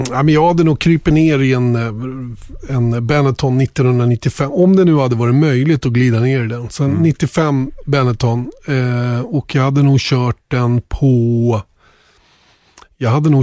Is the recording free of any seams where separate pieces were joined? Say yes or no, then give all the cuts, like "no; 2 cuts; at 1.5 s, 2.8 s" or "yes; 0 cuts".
yes; 0 cuts